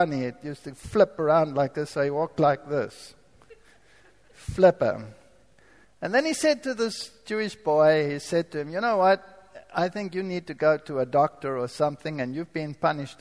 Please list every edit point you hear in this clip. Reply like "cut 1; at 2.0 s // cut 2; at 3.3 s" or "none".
cut 1; at 5.8 s